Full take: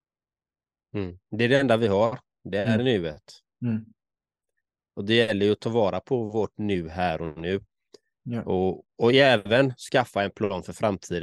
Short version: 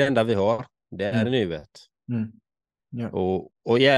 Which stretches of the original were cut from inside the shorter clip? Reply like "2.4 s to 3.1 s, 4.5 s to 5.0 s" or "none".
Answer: 4.3 s to 8.1 s